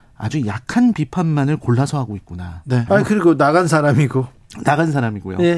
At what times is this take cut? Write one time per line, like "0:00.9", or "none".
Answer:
0:02.9